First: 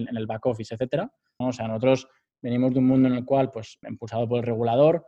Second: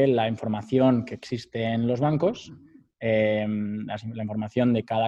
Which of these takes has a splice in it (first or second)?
first